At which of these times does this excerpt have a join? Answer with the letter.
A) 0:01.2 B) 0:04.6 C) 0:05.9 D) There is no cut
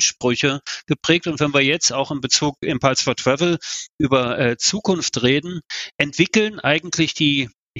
C